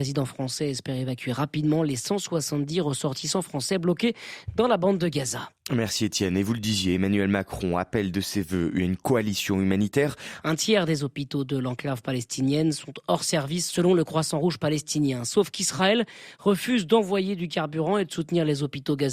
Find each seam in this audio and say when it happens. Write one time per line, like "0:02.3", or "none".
0:10.4